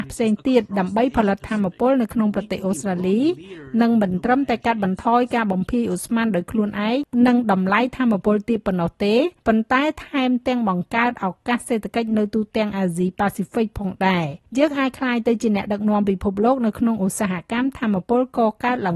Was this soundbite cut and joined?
yes; 2 cuts; at 9.4 s, 14.5 s

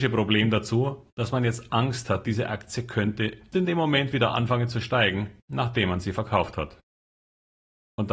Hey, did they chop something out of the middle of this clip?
yes; 2 cuts; at 3.5 s, 5.4 s

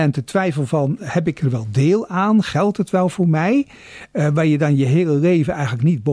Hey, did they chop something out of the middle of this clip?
no; 0 cuts

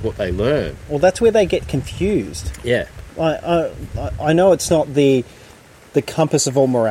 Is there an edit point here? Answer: no; 0 cuts

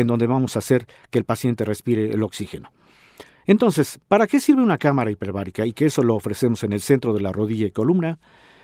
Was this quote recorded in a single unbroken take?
yes; 0 cuts

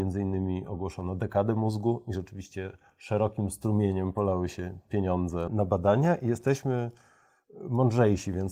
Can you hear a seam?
yes; 1 cut; at 5.5 s

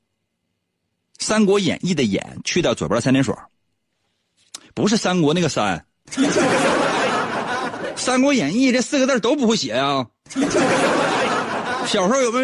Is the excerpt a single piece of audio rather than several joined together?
yes; 0 cuts

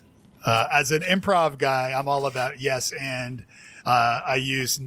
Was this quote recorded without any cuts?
yes; 0 cuts

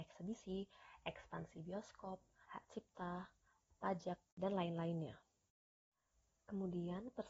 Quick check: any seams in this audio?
yes; 1 cut; at 2.5 s

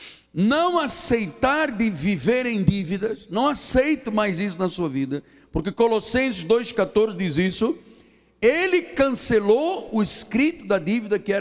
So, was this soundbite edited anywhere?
no; 0 cuts

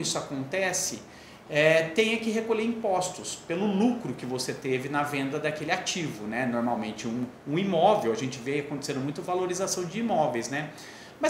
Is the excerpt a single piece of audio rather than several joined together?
yes; 0 cuts

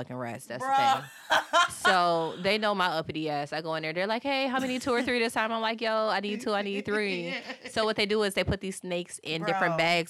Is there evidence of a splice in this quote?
no; 0 cuts

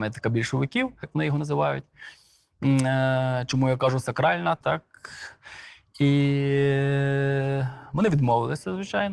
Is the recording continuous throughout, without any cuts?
no; 2 cuts; at 1.0 s, 4.6 s

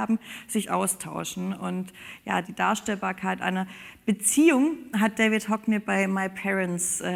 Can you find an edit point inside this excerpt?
yes; 2 cuts; at 2.4 s, 4.9 s

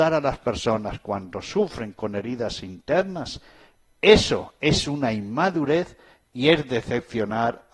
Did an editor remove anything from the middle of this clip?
no; 0 cuts

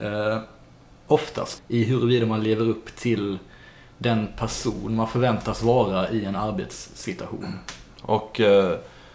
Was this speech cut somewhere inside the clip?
yes; 2 cuts; at 1.6 s, 8.0 s

